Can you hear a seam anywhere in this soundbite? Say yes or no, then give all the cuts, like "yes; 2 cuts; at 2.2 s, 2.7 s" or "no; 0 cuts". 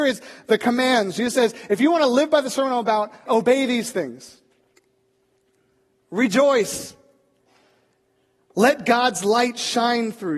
yes; 1 cut; at 3.3 s